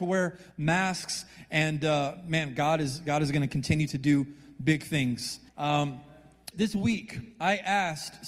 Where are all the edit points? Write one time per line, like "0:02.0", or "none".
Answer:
0:05.5
0:06.5